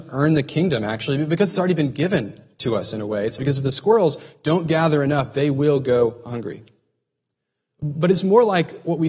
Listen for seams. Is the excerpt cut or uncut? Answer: cut